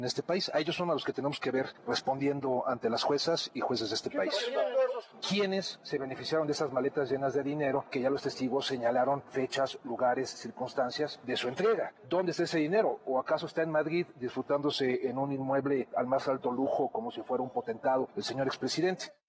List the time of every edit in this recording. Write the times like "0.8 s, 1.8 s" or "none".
none